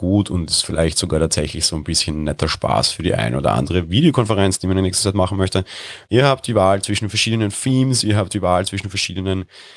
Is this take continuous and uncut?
no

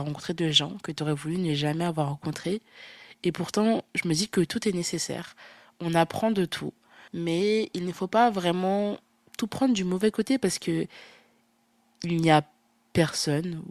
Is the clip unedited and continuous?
no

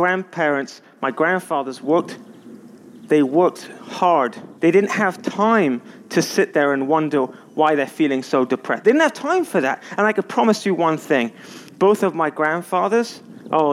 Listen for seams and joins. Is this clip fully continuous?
no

